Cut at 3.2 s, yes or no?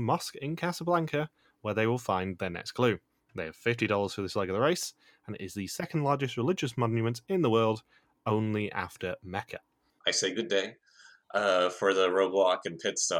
no